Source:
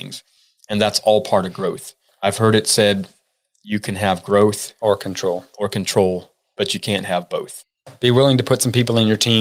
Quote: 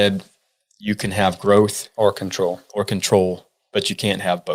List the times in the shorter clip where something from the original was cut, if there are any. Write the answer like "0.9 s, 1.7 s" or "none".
none